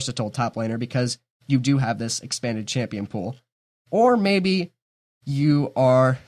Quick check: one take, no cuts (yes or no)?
yes